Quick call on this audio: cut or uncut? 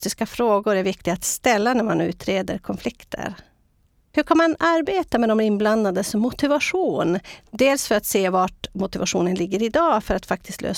uncut